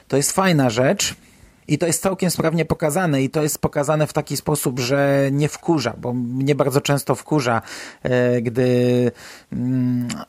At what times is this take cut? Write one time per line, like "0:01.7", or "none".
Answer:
none